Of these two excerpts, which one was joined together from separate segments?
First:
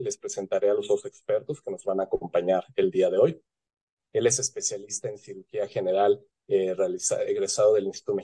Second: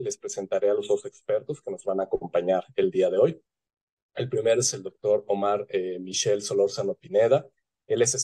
first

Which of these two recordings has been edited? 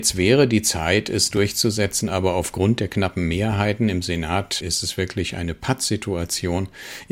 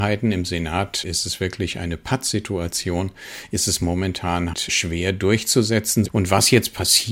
second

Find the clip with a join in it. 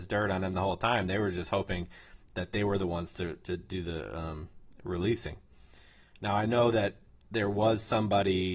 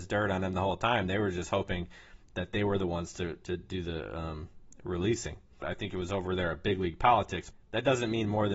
second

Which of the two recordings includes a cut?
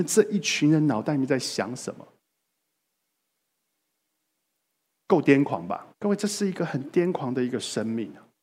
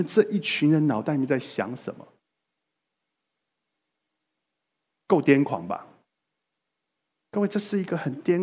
first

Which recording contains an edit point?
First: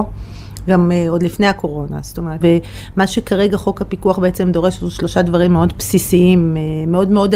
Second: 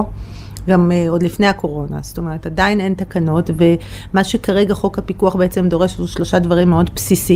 first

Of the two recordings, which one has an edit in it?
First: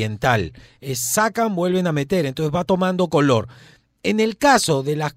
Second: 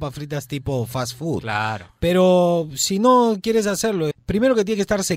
second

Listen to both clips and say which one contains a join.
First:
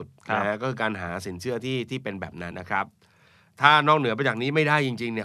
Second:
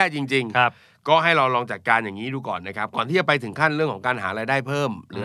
first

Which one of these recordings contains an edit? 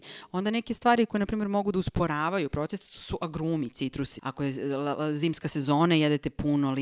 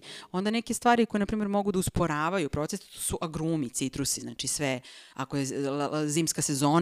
first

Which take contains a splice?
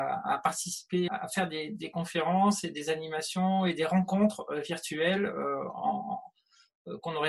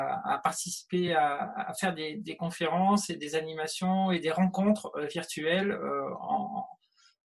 first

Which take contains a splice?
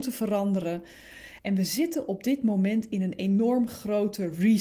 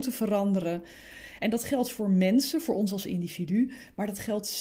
first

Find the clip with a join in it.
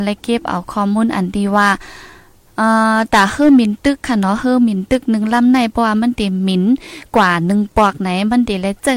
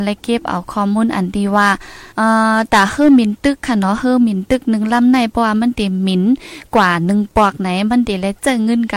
second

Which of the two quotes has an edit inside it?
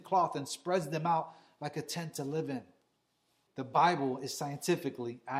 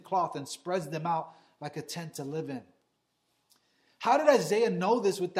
first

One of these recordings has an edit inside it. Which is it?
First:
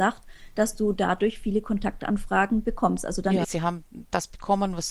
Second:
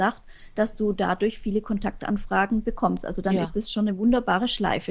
first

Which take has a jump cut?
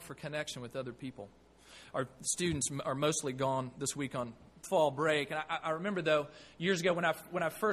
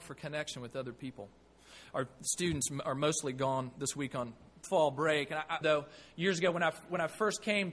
second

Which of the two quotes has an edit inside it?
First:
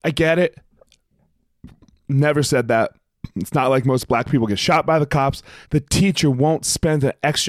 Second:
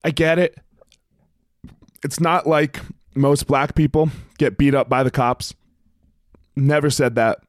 first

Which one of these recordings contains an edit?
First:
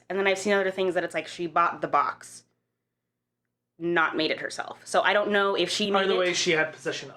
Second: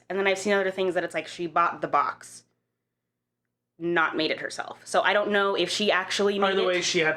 first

